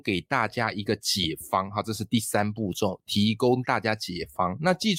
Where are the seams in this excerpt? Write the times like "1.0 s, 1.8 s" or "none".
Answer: none

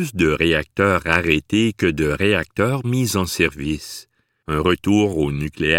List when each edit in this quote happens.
4.4 s

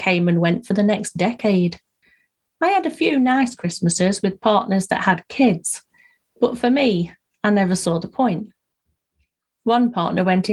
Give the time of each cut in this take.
none

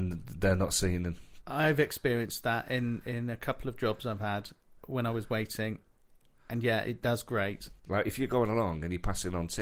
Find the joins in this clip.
1.4 s, 7.8 s

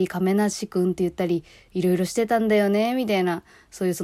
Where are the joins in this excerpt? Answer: none

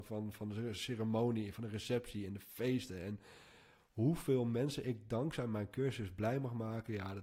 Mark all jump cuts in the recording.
none

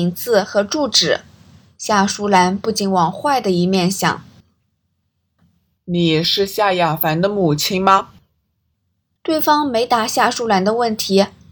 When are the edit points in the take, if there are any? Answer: none

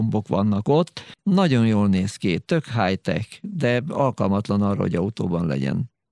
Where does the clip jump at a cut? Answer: 1.2 s

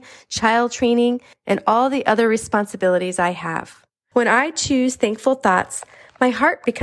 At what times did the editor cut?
1.3 s, 4.1 s

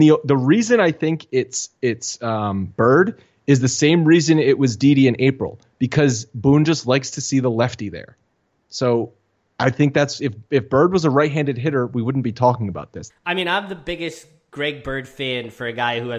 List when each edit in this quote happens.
13.1 s

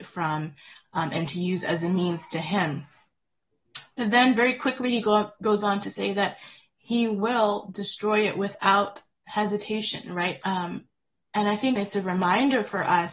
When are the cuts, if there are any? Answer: 10.4 s, 11.8 s

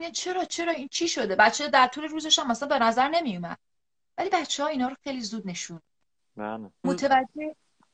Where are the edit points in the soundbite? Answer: 6.8 s

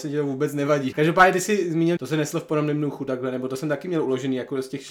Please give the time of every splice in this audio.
0.9 s, 2.0 s

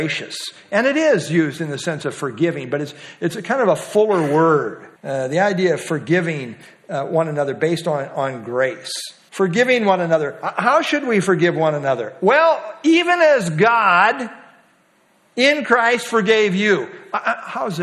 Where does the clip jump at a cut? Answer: 5.0 s, 9.3 s

